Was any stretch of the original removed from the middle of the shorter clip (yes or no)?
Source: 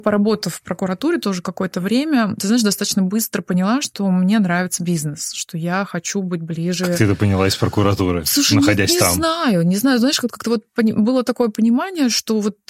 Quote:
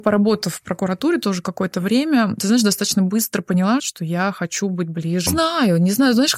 yes